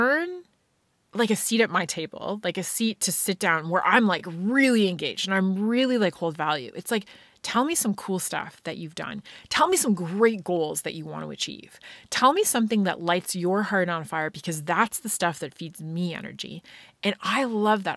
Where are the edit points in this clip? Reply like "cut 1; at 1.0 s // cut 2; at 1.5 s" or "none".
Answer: none